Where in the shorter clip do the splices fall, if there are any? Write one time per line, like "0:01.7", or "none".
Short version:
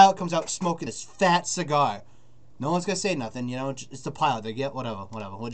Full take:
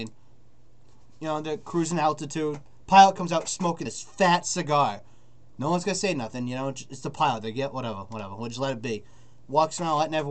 none

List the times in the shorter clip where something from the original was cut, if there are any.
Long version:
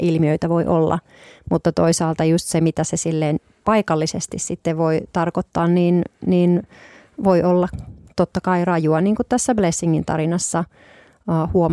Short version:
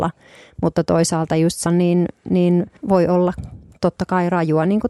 0:01.7
0:02.8

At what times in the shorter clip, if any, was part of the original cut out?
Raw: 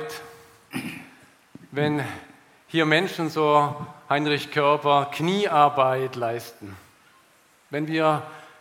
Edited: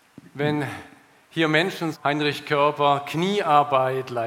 0:01.9

